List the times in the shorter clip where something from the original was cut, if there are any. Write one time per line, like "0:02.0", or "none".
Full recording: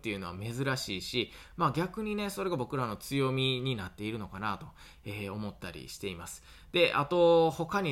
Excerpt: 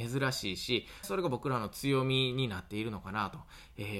0:01.0

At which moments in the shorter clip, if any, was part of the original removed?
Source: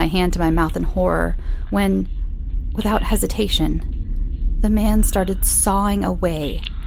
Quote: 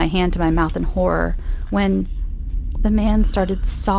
0:02.8

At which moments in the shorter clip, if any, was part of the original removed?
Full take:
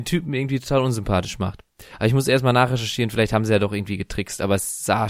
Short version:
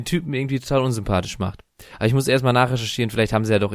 none

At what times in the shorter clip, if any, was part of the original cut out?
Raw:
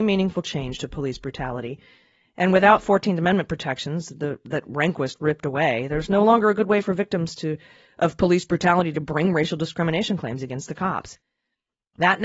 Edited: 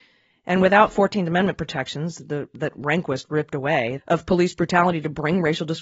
0:04.0

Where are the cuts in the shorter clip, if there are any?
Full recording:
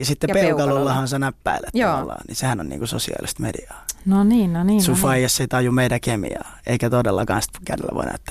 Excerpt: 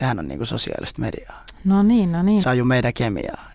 0:02.4

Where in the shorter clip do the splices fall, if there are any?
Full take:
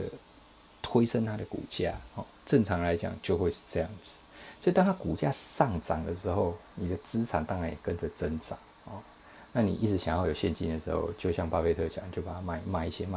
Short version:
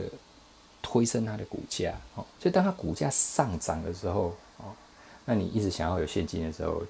0:02.4
0:04.5

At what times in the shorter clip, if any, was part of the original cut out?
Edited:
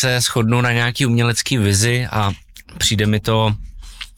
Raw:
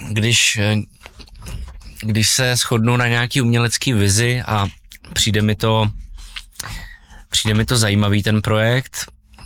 none

